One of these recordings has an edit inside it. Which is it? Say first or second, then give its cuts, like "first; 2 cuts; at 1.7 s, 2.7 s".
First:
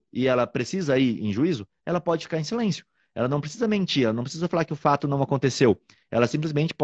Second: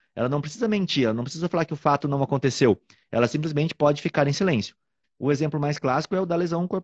second; 1 cut; at 5.0 s